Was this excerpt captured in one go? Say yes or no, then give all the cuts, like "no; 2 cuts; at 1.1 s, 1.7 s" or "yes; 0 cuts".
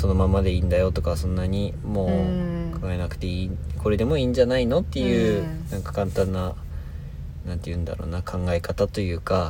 yes; 0 cuts